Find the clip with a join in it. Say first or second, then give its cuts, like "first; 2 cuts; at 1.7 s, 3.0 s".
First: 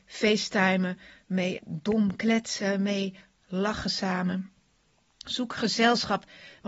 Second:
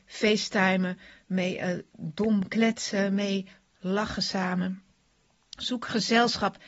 first; 1 cut; at 1.6 s